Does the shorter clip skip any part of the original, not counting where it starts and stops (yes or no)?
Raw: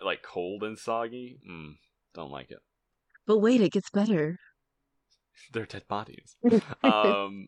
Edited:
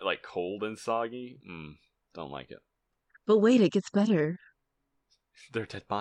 no